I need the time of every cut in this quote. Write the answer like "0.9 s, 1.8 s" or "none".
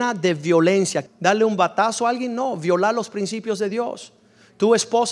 1.1 s